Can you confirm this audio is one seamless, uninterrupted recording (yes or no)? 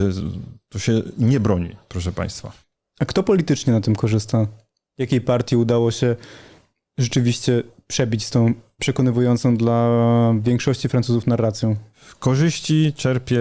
yes